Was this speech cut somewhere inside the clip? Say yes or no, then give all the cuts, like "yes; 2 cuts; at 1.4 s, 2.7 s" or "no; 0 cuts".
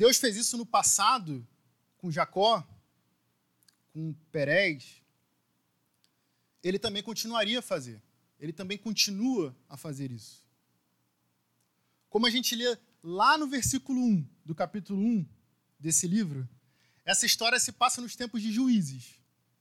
no; 0 cuts